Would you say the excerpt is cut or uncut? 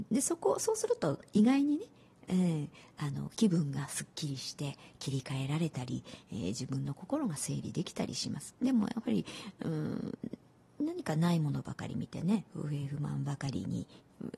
uncut